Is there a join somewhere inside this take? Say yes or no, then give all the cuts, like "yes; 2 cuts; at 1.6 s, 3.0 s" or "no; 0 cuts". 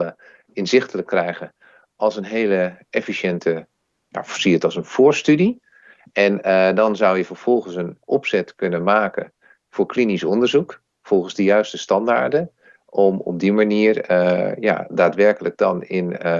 no; 0 cuts